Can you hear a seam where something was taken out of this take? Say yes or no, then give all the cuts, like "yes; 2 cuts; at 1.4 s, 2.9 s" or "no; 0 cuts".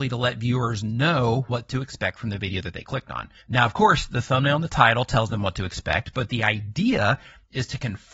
yes; 1 cut; at 3.4 s